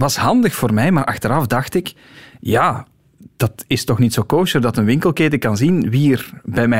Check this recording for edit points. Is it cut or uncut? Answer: uncut